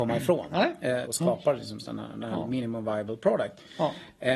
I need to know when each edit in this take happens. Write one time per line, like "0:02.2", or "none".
0:01.0